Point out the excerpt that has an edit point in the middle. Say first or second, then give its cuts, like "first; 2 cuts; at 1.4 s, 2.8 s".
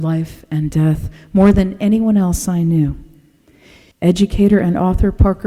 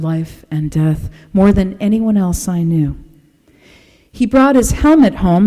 first; 1 cut; at 3.9 s